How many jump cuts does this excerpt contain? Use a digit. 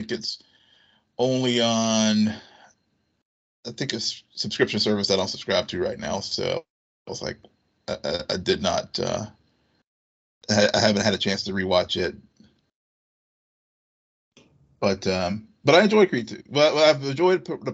0